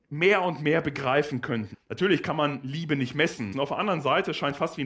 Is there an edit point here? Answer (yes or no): yes